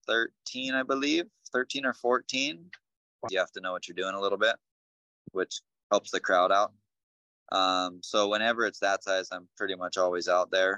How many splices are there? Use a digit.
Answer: 1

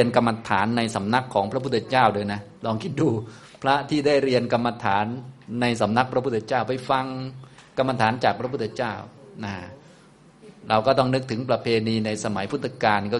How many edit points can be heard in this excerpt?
1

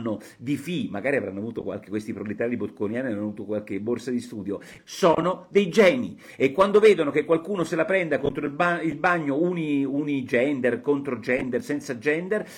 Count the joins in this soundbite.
1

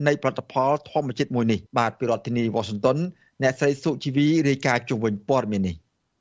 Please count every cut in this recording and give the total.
1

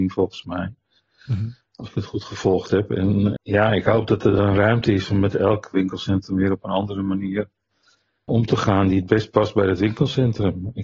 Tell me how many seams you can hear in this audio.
2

